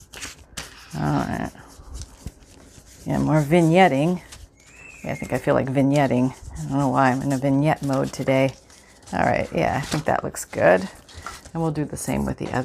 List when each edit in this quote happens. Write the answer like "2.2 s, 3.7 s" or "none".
none

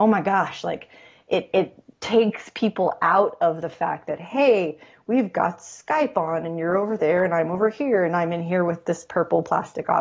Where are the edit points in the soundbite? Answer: none

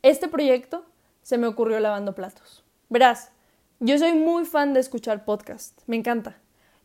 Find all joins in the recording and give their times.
2.9 s

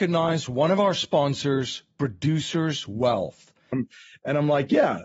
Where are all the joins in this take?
3.7 s

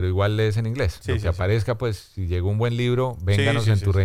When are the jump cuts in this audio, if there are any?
none

